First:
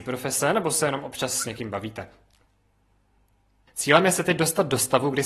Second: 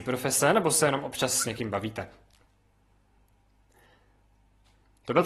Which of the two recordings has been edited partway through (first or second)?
first